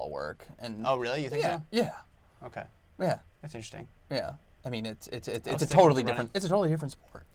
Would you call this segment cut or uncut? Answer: uncut